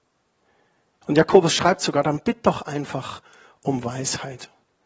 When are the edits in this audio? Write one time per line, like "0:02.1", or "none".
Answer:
0:01.0